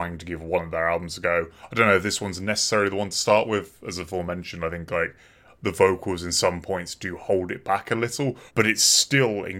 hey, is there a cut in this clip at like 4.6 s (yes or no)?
no